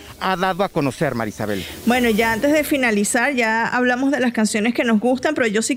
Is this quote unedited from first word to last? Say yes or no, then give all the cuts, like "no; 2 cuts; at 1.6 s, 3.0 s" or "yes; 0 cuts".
yes; 0 cuts